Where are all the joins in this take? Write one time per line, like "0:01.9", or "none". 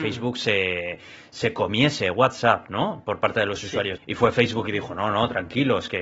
0:04.0